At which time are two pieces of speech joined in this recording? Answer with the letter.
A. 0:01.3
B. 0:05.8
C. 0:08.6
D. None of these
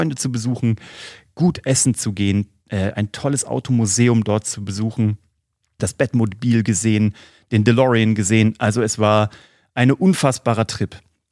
B